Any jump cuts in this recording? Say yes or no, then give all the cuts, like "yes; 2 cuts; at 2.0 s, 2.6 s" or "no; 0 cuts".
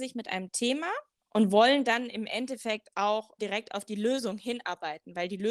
yes; 2 cuts; at 1.2 s, 3.4 s